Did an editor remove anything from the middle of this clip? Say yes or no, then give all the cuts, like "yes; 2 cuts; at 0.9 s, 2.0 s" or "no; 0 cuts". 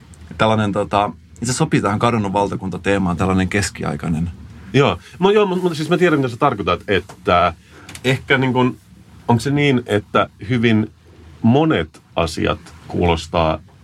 no; 0 cuts